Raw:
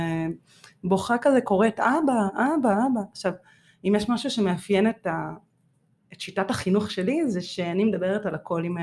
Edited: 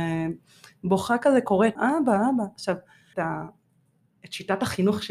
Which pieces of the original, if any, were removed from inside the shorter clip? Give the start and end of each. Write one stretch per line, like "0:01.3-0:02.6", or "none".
0:01.8-0:02.3
0:03.7-0:05.0